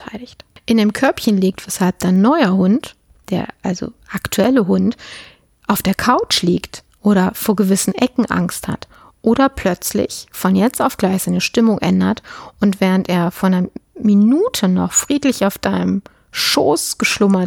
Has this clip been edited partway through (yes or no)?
no